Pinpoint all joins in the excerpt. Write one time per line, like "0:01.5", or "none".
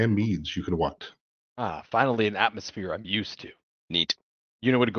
0:03.7